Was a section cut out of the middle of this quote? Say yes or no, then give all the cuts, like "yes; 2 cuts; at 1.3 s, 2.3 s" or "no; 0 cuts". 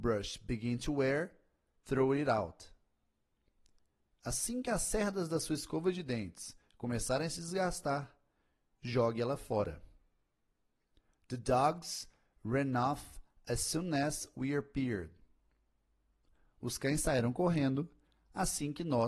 no; 0 cuts